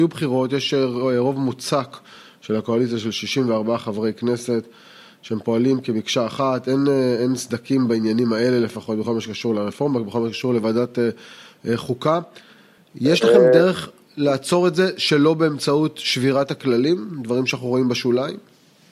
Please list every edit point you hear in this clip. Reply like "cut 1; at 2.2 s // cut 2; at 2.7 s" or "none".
none